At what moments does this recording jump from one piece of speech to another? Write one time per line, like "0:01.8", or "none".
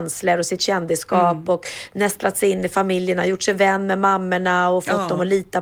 none